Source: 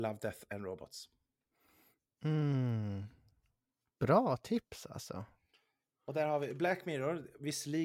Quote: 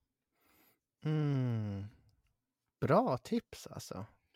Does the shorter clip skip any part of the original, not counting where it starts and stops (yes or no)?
no